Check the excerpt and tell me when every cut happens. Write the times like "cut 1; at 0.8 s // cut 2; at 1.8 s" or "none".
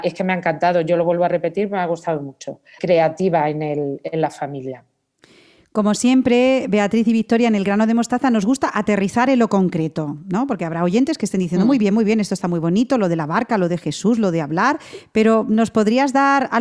cut 1; at 2.8 s

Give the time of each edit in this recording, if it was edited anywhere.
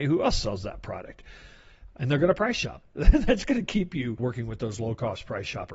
cut 1; at 2.8 s

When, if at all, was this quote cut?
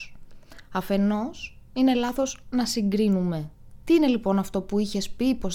cut 1; at 3.8 s

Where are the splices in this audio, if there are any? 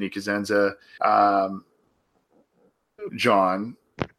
cut 1; at 1.0 s // cut 2; at 3.1 s

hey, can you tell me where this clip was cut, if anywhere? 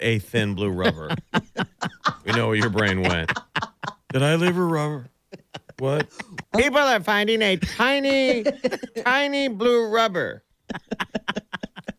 cut 1; at 6.4 s // cut 2; at 8.9 s

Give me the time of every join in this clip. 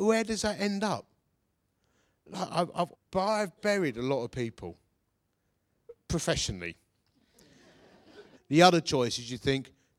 cut 1; at 2.9 s // cut 2; at 8.4 s

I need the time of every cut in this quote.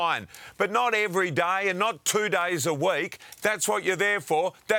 cut 1; at 3.3 s

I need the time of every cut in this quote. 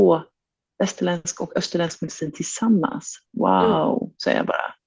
none

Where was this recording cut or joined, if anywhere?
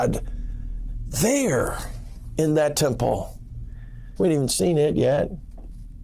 cut 1; at 4.2 s

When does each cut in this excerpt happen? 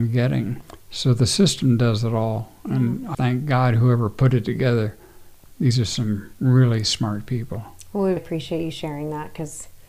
cut 1; at 3.1 s // cut 2; at 8.2 s

